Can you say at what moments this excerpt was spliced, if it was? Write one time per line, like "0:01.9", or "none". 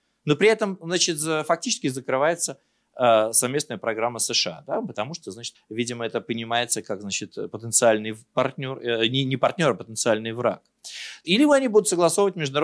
0:05.5
0:11.2